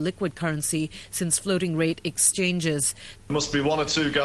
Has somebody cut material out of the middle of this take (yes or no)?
yes